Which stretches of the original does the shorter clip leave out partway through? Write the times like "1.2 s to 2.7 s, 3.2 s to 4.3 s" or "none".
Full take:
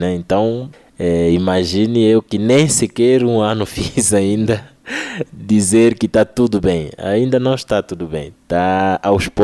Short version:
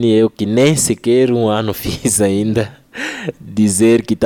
none